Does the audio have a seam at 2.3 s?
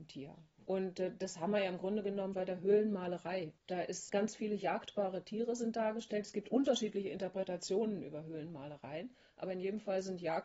yes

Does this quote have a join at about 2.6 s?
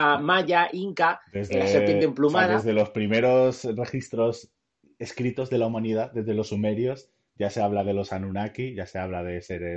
no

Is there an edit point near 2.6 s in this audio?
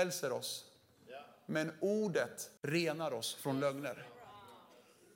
yes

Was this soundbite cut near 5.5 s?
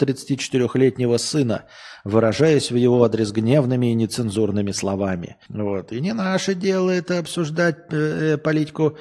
yes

